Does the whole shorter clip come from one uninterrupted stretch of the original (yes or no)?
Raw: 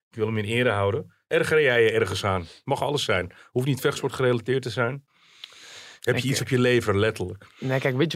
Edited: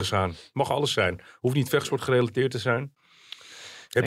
yes